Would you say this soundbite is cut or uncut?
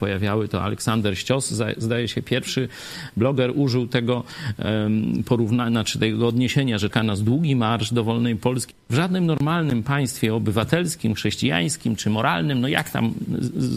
cut